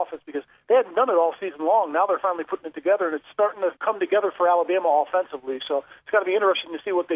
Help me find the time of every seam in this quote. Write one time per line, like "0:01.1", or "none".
0:03.8